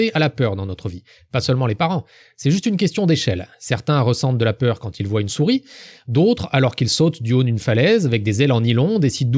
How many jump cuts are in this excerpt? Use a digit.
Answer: 0